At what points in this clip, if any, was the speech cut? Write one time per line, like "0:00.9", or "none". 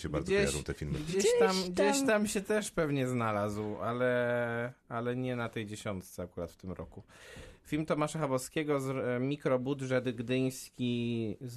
none